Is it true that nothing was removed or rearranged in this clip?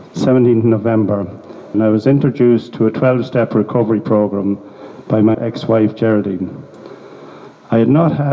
no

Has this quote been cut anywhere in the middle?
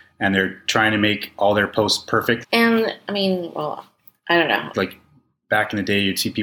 yes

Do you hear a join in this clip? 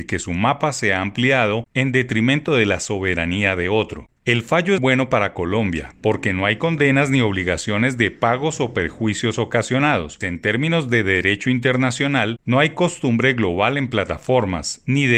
yes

